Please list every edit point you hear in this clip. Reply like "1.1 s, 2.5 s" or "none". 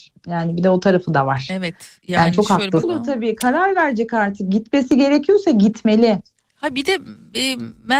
2.8 s